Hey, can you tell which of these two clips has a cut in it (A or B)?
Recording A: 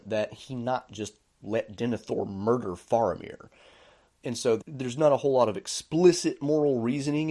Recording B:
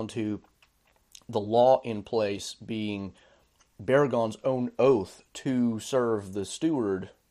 A